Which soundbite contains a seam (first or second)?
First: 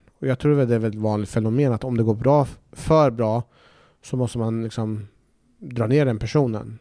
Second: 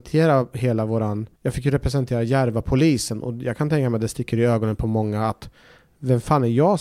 second